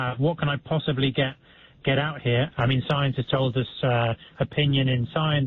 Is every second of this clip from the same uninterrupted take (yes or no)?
no